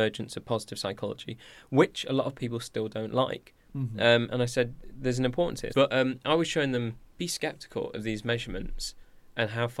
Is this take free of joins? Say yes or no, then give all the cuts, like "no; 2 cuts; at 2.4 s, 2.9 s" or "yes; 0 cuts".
no; 1 cut; at 5.7 s